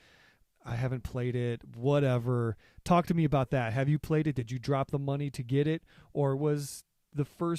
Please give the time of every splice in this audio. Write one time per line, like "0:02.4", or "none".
none